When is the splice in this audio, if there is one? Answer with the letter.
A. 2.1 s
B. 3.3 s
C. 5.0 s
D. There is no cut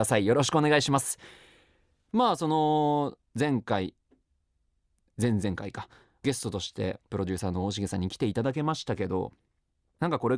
A